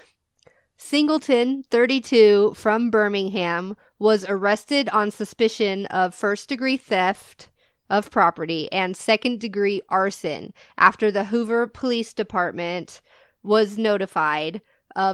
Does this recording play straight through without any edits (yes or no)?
yes